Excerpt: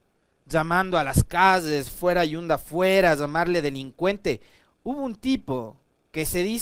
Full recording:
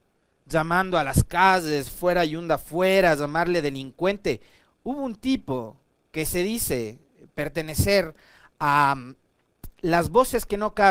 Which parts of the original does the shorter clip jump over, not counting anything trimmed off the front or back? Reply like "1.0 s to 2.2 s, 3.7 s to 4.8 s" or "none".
none